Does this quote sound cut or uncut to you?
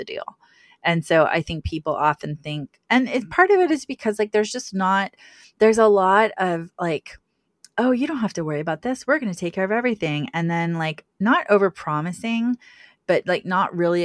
uncut